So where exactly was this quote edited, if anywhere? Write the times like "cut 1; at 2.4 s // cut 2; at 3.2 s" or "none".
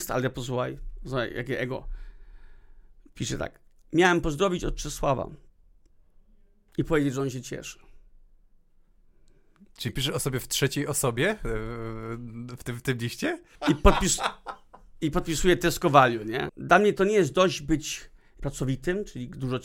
cut 1; at 13.6 s // cut 2; at 16.5 s // cut 3; at 18.4 s